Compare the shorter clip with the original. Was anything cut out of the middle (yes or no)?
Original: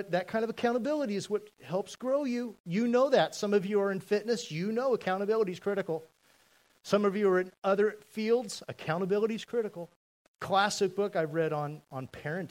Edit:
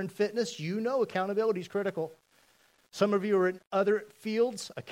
no